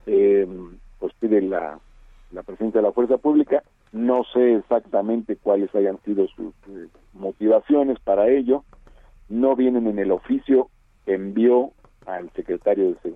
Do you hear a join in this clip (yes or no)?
no